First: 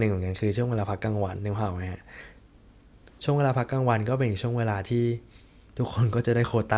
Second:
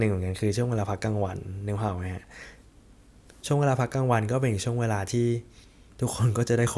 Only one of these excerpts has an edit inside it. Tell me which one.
first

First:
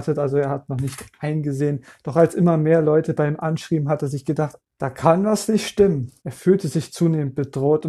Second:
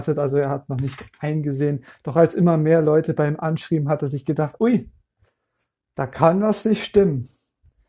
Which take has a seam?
first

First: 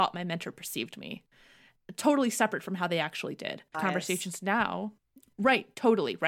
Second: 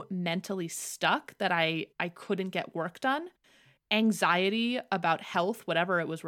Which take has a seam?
first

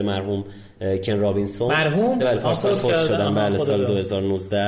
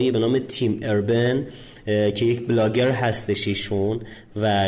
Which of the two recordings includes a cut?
first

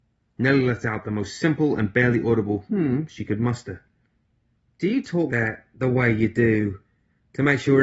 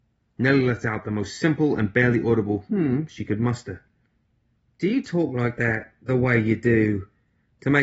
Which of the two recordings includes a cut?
first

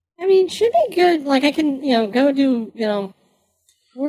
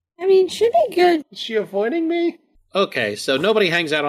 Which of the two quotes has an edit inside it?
second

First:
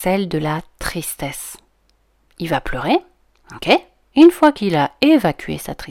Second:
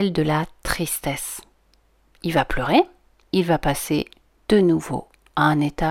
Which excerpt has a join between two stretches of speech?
second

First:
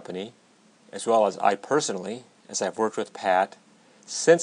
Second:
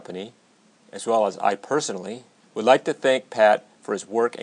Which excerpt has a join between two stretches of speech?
second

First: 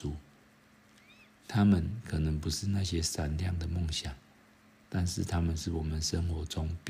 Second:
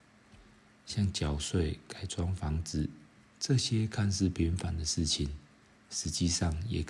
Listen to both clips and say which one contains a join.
second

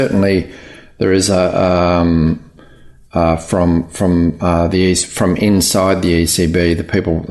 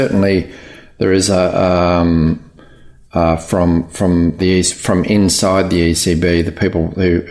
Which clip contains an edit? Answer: second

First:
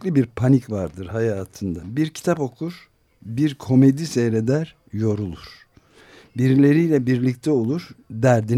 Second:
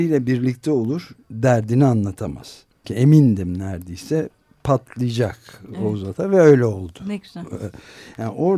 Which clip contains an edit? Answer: second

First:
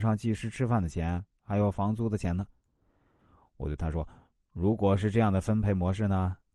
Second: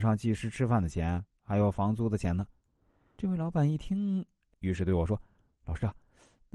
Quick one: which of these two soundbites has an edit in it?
second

